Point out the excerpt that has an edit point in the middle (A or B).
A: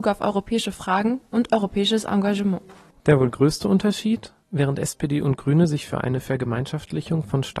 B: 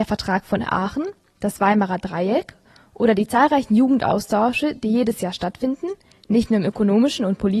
B